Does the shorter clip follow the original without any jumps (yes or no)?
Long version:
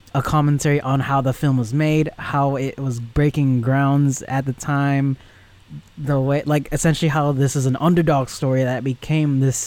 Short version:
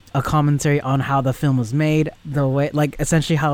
no